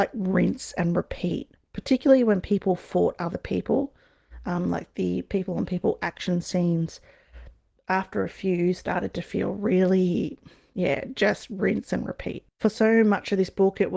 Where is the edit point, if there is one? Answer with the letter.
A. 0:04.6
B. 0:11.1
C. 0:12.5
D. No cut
C